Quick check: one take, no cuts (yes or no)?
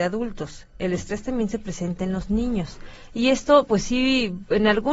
yes